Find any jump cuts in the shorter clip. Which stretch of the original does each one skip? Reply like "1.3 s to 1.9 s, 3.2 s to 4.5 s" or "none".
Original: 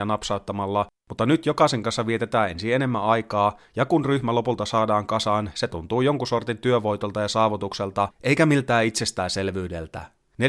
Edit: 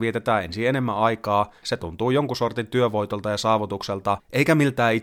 3.7 s to 5.5 s